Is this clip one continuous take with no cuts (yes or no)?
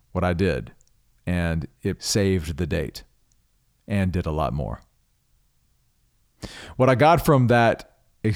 no